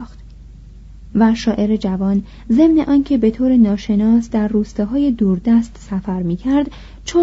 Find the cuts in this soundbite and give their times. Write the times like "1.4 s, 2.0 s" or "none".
1.1 s